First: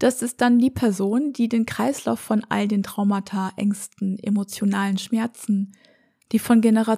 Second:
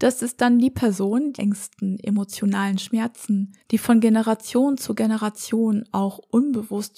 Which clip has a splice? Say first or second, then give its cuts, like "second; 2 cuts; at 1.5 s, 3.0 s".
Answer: second; 2 cuts; at 1.3 s, 3.6 s